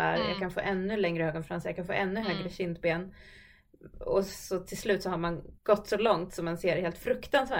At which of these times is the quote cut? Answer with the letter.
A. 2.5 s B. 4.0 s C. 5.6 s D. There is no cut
C